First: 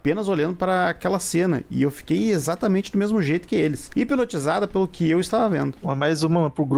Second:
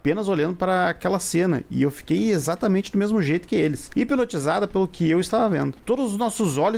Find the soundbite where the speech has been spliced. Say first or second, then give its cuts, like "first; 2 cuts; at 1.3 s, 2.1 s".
second; 1 cut; at 5.8 s